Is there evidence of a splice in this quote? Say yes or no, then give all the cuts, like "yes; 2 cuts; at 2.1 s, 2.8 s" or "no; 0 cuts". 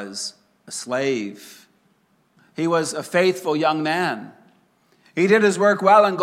yes; 1 cut; at 2.4 s